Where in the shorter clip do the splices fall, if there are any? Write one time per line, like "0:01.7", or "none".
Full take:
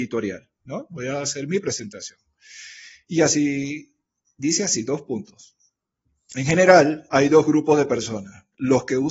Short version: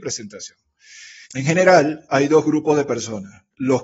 0:01.2